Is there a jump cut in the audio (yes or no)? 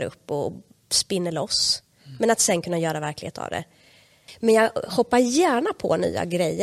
no